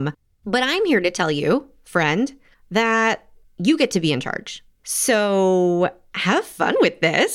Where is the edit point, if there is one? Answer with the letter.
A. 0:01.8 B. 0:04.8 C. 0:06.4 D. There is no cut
B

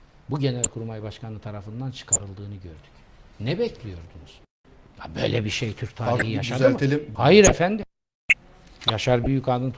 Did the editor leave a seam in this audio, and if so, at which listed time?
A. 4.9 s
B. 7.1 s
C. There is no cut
B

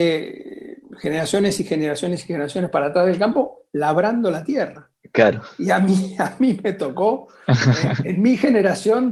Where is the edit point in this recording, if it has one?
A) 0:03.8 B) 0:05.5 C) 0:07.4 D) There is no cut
D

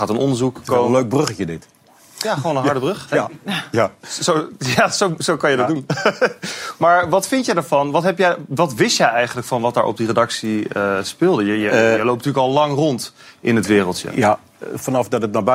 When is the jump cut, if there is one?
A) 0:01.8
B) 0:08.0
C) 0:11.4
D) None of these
D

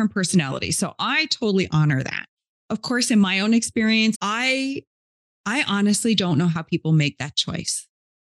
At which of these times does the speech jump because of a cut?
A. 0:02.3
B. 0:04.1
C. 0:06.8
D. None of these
B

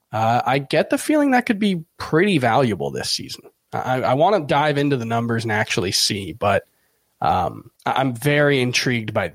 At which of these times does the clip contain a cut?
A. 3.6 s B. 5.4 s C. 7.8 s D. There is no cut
C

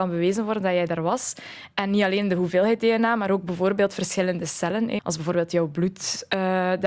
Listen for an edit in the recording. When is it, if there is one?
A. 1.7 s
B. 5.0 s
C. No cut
B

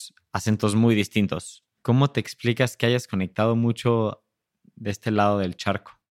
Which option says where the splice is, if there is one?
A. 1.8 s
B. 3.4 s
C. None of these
A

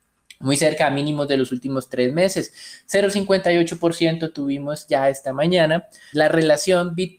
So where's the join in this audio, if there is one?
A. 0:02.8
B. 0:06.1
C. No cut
B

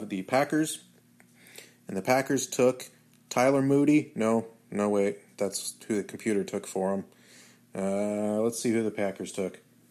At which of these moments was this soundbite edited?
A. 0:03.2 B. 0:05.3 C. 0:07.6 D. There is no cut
D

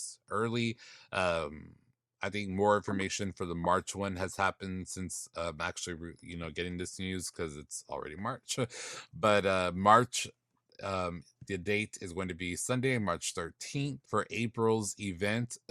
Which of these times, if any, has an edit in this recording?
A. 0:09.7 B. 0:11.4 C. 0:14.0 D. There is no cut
C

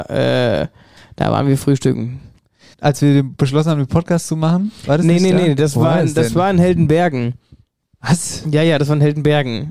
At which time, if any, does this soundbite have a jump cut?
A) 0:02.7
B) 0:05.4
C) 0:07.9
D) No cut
A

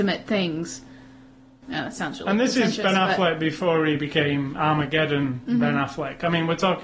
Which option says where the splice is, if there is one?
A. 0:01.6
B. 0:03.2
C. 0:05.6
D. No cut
A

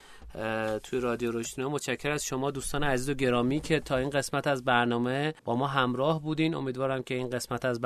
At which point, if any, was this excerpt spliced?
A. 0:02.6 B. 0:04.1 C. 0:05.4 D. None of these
C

